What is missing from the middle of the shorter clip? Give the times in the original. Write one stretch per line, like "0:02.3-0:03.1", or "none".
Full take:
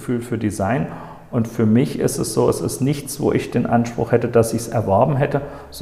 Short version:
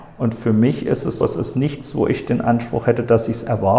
0:02.3-0:02.5